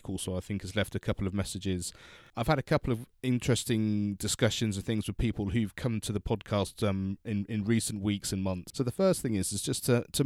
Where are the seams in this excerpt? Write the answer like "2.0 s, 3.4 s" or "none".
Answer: 8.7 s